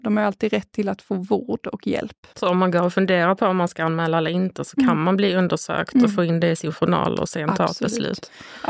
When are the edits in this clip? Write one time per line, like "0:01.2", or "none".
0:02.3